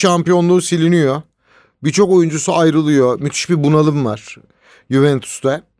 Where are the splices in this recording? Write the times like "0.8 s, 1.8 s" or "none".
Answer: none